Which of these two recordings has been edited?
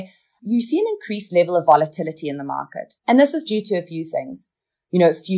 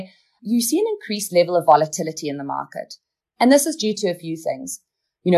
first; 1 cut; at 3.0 s

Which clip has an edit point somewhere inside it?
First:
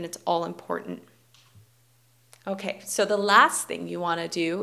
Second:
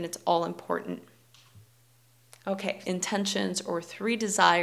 second; 1 cut; at 2.8 s

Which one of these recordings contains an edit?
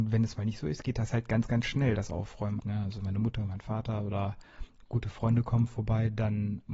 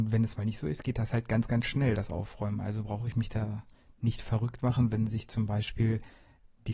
first; 1 cut; at 2.6 s

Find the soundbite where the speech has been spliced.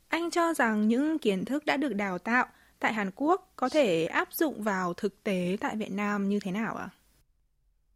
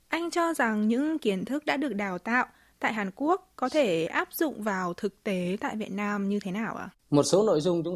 second; 1 cut; at 6.9 s

